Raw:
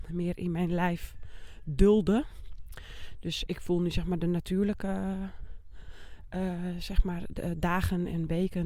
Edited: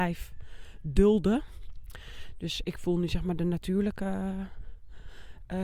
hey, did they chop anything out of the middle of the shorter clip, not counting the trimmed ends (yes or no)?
no